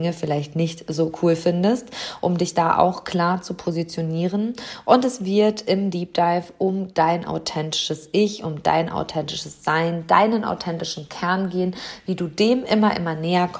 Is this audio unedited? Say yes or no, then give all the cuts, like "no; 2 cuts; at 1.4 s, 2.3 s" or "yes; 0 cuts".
yes; 0 cuts